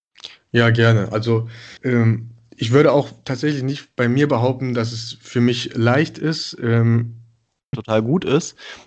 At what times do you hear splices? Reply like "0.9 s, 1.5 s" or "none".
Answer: 1.8 s, 7.7 s